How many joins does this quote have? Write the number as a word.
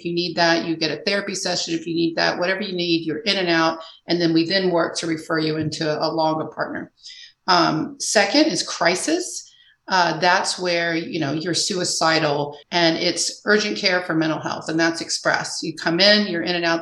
one